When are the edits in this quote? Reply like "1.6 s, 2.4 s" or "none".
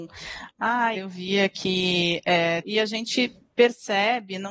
0.9 s, 2.6 s

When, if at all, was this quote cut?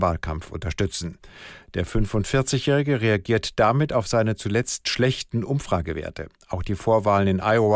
none

